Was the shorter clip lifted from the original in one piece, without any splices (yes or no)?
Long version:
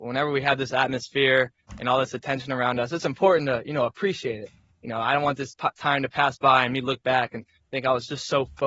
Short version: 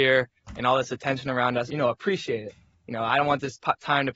no